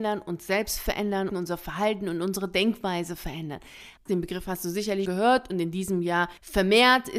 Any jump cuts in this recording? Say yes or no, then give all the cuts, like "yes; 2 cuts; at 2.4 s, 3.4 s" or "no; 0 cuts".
yes; 3 cuts; at 1.3 s, 4.1 s, 5.1 s